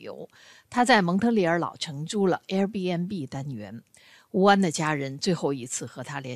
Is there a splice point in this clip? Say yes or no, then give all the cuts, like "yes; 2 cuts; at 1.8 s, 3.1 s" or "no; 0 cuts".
no; 0 cuts